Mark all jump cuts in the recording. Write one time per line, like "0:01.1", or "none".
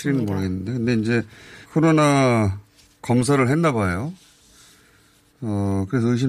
0:01.6